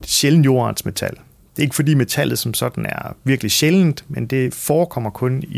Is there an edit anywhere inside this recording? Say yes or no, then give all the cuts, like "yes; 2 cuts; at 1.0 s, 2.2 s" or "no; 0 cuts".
no; 0 cuts